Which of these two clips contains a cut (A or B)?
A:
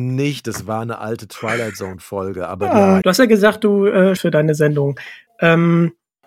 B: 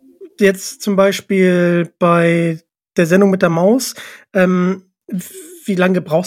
A